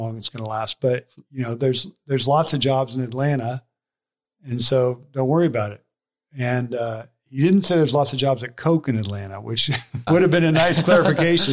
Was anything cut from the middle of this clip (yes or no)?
yes